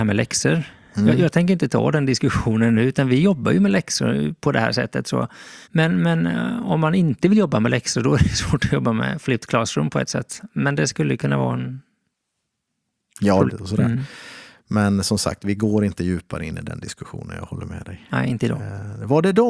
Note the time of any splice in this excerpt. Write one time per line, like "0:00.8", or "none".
0:05.6
0:13.5